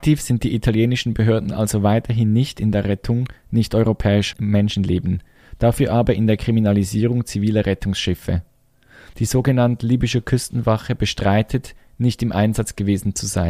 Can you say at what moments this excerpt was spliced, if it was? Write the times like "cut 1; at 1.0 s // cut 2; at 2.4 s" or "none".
cut 1; at 4.3 s // cut 2; at 9.1 s